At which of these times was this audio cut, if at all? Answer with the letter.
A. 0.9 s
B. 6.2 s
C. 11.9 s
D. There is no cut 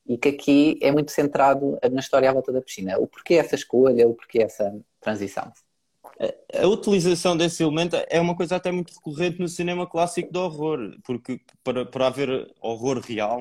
D